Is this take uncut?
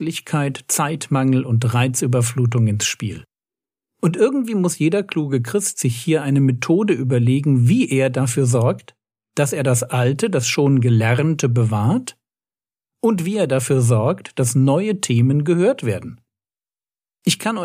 yes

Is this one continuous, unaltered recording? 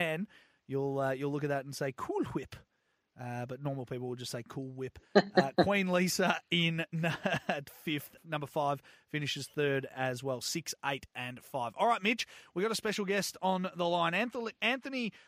no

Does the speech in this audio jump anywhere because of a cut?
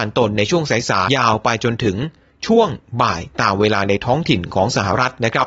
yes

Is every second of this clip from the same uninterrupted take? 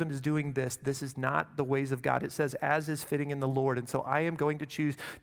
yes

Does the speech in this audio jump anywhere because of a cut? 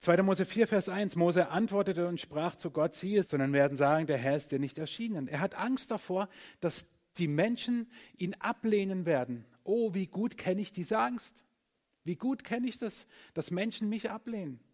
yes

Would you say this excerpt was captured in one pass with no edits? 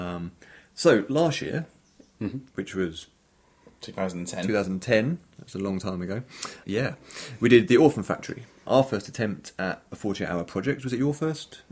no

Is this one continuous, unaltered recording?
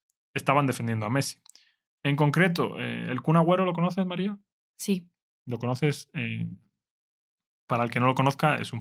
yes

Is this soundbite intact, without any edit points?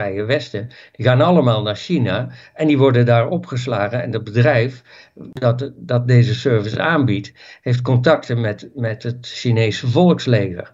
yes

